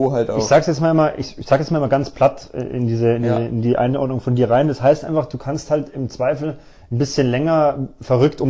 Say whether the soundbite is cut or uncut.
uncut